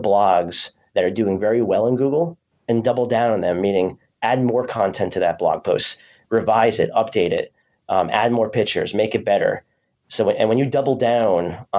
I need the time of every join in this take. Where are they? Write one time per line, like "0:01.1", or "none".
none